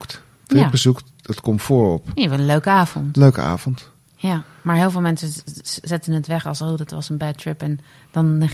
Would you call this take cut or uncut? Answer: cut